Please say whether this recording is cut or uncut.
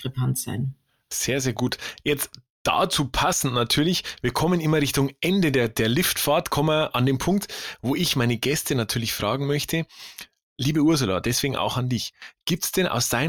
uncut